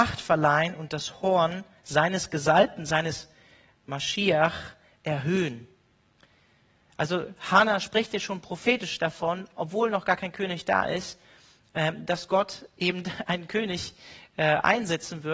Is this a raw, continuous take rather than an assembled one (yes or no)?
no